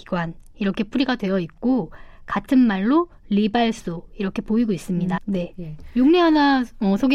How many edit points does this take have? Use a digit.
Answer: 1